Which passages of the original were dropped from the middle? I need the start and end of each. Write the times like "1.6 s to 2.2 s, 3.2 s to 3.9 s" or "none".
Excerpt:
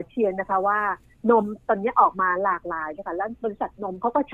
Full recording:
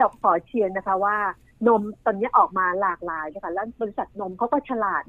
none